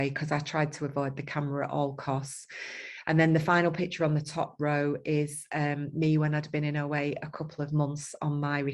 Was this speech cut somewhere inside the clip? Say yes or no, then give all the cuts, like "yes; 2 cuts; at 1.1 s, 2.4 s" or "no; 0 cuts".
no; 0 cuts